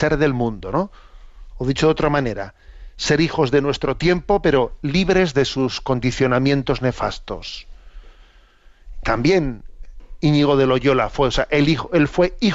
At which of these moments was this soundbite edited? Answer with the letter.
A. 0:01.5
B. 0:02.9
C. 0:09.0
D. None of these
A